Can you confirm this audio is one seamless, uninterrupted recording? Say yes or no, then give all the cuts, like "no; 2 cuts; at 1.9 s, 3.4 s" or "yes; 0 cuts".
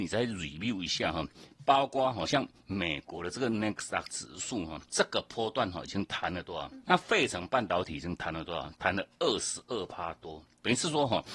no; 2 cuts; at 4.9 s, 6.8 s